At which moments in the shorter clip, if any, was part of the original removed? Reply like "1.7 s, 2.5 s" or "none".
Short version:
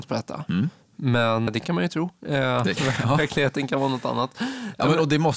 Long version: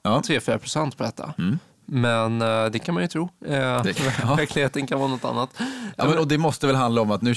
1.5 s

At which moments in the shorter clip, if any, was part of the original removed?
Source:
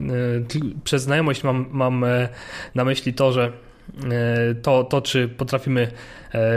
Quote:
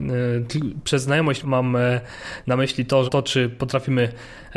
1.4 s, 3.1 s

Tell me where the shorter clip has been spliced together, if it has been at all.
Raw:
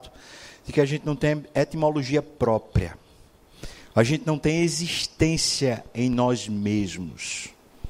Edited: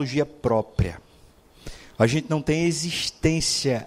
none

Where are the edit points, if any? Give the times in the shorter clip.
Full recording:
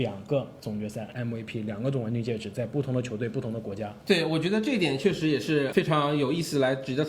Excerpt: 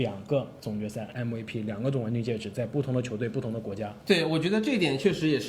none

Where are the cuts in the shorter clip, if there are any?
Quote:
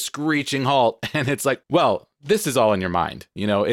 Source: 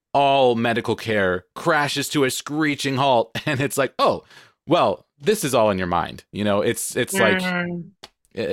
1.6 s

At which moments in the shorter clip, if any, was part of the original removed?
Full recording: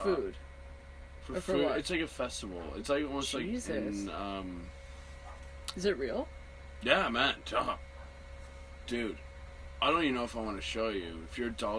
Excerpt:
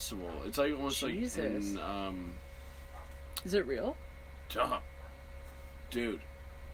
4.5 s

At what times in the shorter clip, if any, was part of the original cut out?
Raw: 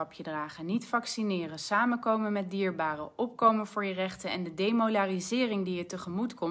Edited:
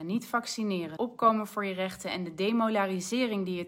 1.0 s

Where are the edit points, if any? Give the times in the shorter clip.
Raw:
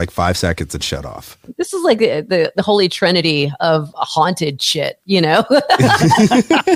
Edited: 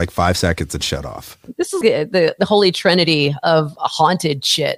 1.8 s

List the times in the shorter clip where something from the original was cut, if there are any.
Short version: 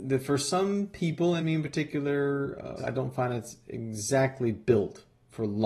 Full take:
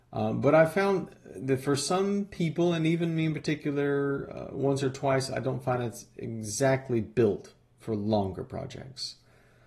1.4 s, 2.8 s

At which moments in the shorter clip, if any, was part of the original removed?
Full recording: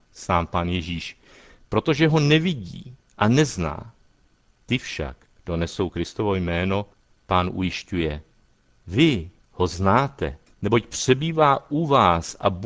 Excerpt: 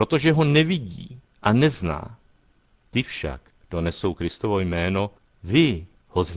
5.3 s

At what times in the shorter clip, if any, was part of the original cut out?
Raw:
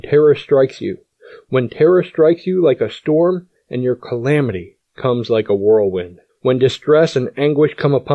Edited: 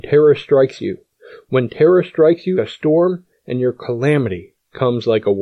2.5 s

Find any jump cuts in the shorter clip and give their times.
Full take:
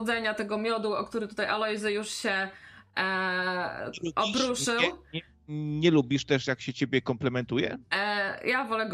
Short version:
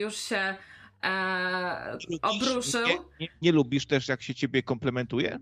3.4 s

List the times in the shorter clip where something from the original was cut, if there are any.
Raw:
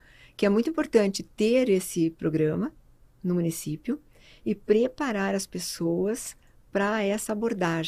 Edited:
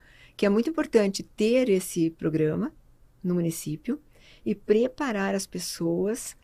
none

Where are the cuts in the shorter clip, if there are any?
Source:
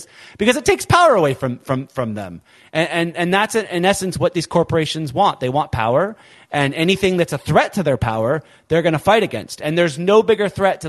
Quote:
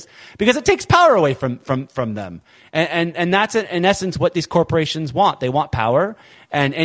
none

